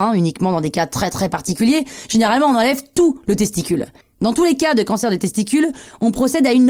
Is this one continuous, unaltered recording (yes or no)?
no